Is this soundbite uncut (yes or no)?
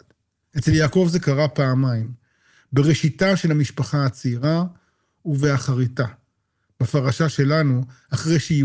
yes